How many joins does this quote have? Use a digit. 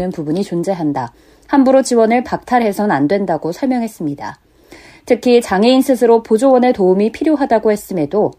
0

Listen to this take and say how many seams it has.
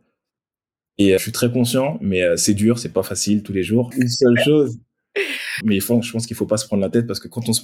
3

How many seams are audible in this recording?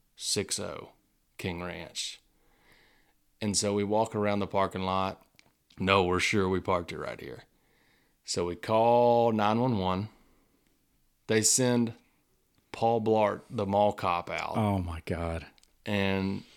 0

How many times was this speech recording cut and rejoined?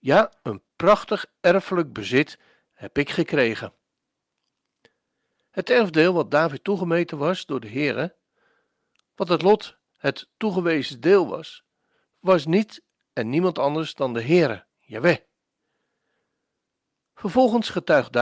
2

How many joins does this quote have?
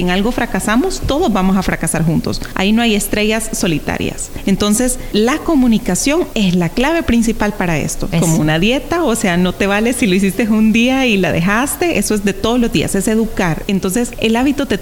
1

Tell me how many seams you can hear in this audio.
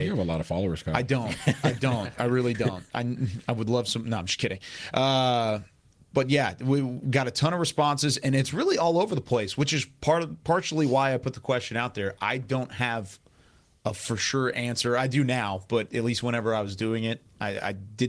0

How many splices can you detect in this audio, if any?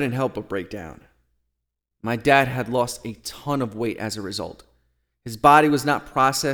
1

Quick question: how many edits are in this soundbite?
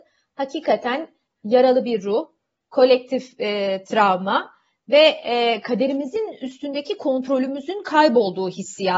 0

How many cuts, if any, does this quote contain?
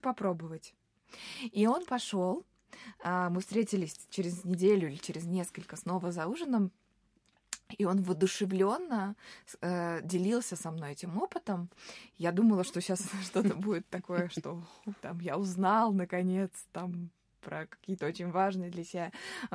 0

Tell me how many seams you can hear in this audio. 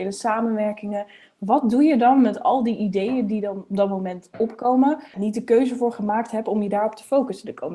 1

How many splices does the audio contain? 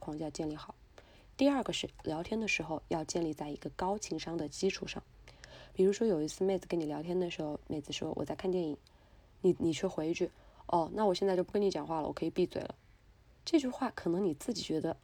0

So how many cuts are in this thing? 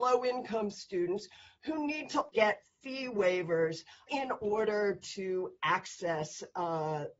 2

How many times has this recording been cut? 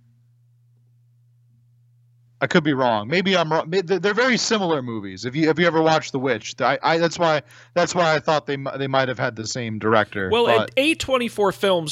0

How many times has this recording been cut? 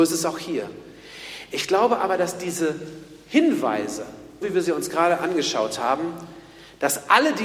1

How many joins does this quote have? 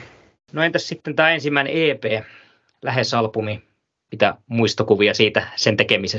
0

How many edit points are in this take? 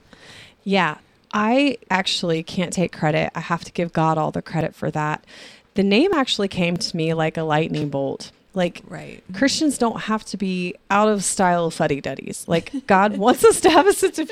1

